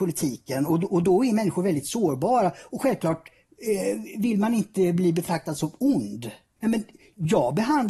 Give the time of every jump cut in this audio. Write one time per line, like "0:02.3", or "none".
0:06.6